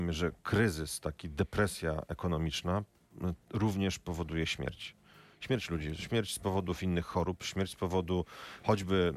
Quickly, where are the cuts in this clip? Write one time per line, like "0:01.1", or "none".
none